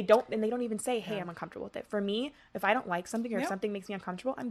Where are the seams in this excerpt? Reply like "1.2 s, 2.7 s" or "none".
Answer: none